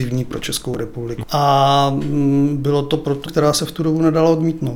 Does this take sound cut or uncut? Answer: cut